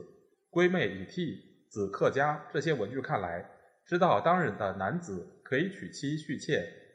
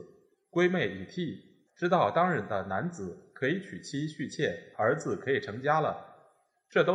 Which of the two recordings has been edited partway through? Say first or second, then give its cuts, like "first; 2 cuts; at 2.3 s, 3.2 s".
second; 2 cuts; at 1.7 s, 4.7 s